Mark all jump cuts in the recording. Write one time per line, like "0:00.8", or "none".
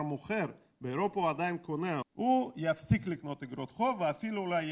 0:02.0